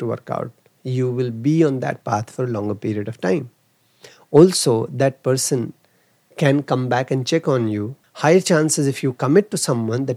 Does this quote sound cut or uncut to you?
cut